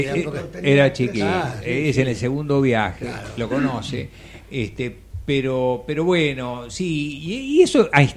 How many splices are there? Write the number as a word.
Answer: zero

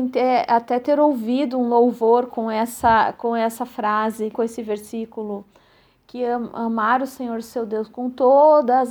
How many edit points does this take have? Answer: one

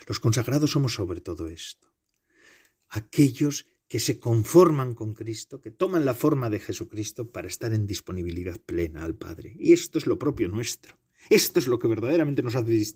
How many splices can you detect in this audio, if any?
zero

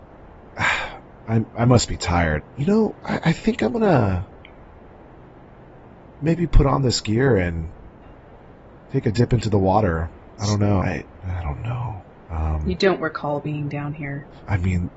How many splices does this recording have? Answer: two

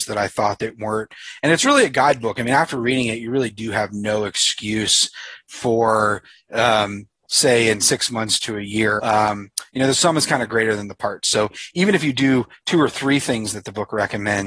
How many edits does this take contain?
two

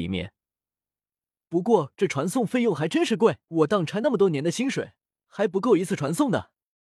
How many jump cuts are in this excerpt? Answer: two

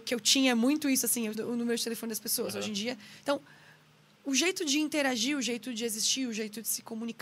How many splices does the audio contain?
one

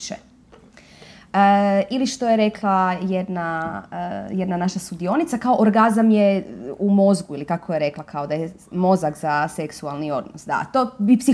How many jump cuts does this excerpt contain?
zero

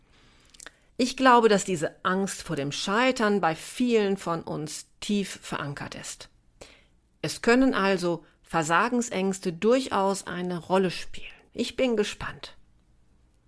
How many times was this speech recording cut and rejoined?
one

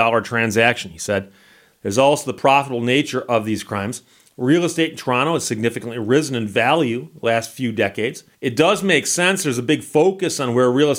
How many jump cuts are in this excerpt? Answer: one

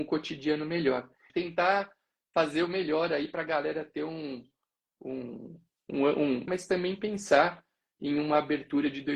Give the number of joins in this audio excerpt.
two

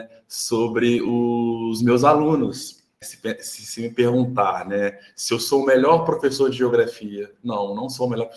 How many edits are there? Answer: one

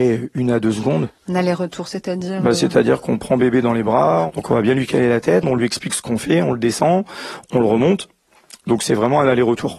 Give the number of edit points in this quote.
one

